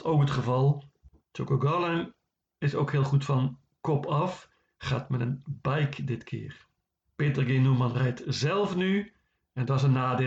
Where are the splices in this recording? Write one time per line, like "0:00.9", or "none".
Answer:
0:01.2
0:07.0